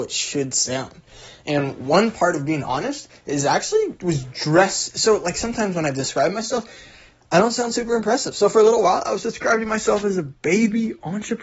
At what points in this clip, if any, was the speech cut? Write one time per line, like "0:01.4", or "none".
0:04.0